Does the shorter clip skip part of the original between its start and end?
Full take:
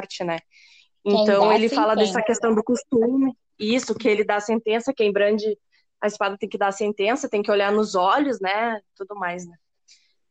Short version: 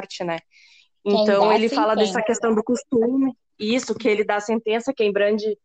no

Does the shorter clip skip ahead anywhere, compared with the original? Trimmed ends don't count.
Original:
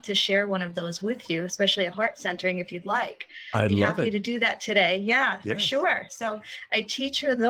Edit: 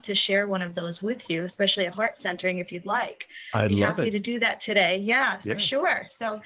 no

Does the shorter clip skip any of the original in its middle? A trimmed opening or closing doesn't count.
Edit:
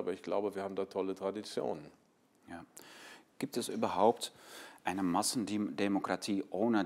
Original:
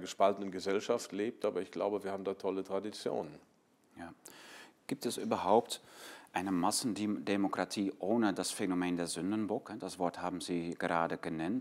no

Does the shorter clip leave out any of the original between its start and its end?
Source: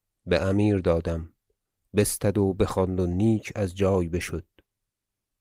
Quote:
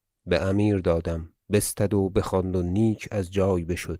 yes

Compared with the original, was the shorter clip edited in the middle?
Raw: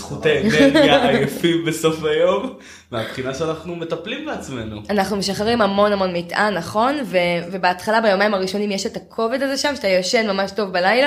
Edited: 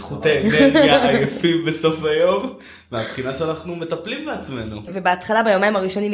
yes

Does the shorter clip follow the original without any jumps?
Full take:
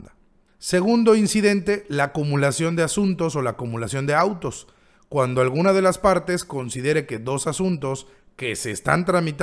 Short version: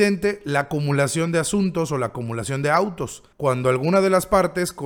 no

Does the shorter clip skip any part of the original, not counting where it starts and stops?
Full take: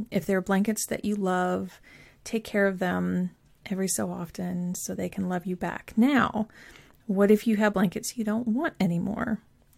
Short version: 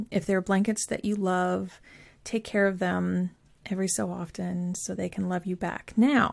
no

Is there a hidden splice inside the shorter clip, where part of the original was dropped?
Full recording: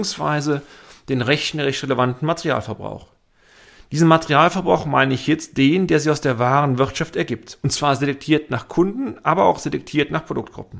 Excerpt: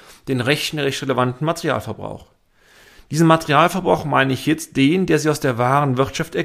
no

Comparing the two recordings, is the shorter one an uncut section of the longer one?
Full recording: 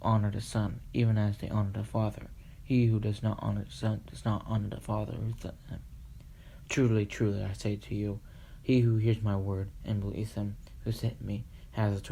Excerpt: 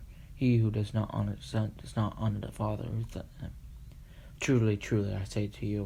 yes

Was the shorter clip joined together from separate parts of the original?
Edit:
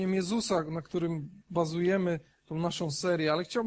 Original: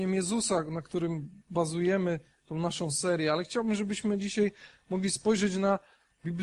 no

